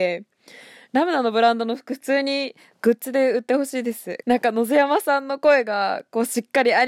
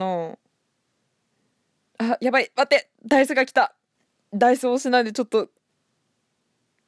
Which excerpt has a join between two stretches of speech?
first; 1 cut; at 4.2 s

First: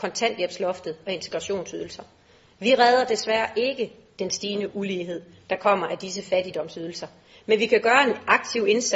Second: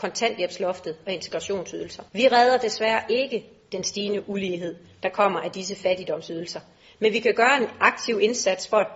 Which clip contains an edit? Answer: second; 1 cut; at 2.1 s

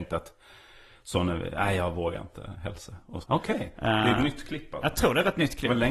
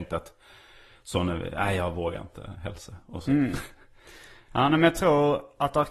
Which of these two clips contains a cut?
first; 1 cut; at 3.2 s

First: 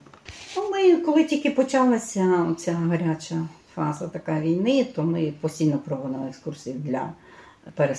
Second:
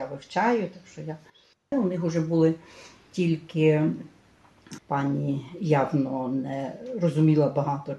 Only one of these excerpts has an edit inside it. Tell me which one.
second; 2 cuts; at 1.7 s, 4.8 s

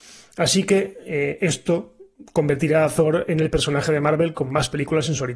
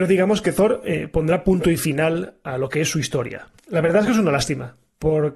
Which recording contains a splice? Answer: second; 1 cut; at 3.6 s

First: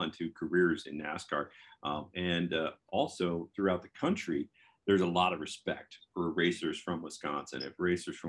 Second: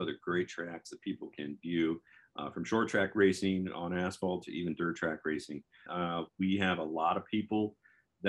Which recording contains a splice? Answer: second; 1 cut; at 5.9 s

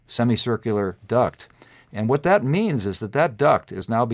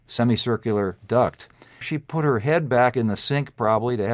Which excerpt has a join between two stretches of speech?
second; 1 cut; at 1.8 s

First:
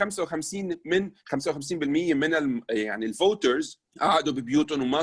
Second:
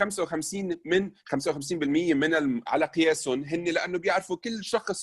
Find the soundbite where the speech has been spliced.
second; 1 cut; at 2.7 s

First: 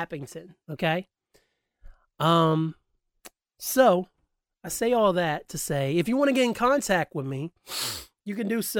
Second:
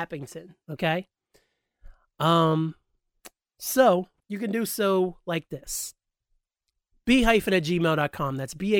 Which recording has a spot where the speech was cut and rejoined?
second; 1 cut; at 4.2 s

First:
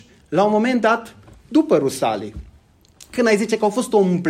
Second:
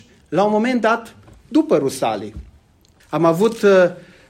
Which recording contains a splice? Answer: second; 1 cut; at 3.0 s

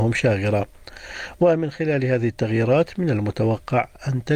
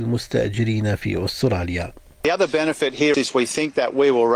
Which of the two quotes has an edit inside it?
second; 1 cut; at 3.1 s

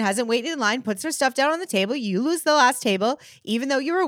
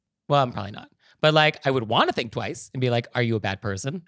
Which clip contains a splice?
second; 1 cut; at 3.1 s

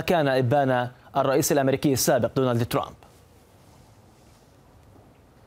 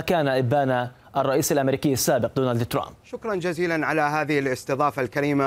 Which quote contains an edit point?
second; 1 cut; at 3.0 s

